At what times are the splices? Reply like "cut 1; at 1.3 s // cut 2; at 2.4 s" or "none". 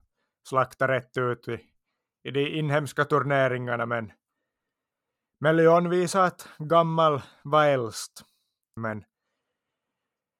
cut 1; at 8.8 s